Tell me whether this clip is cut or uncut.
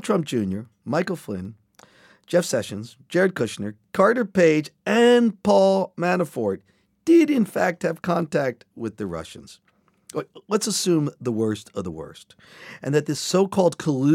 uncut